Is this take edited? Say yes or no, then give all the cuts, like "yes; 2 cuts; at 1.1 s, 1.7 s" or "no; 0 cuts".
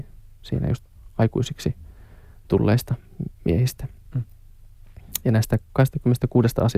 no; 0 cuts